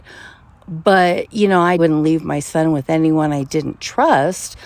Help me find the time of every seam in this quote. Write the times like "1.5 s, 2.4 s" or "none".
1.8 s